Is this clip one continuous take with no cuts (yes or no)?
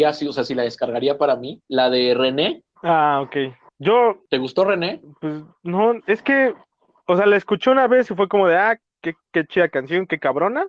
yes